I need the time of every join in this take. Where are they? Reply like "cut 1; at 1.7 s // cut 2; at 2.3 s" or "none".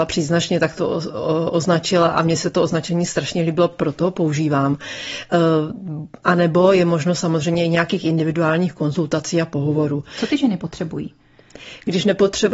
none